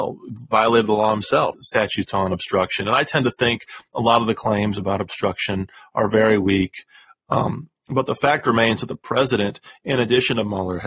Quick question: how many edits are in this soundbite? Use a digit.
1